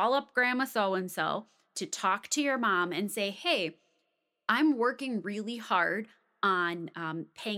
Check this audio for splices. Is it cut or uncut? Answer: uncut